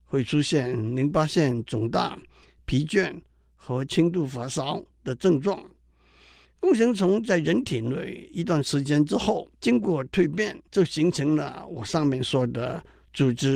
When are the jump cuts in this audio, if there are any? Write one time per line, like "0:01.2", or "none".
0:09.5
0:10.7

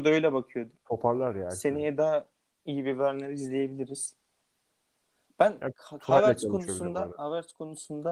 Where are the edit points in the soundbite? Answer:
none

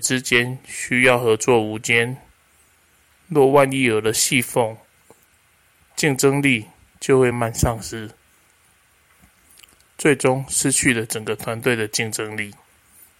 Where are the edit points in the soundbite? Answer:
0:07.3

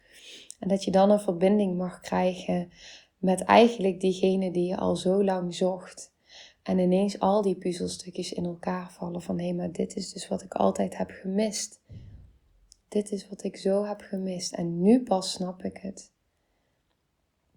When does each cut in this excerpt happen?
none

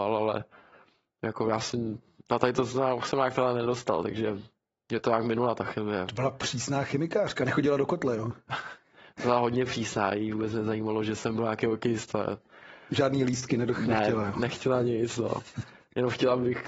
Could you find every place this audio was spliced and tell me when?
none

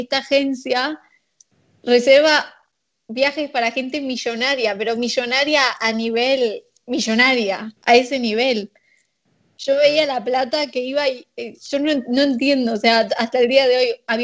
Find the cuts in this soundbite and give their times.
0:07.8

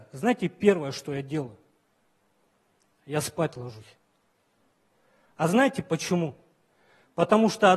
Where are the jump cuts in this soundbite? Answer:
none

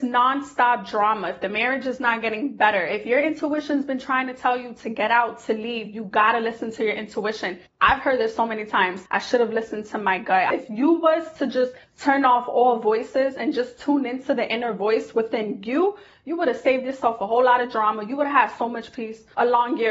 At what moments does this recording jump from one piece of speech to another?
0:09.1

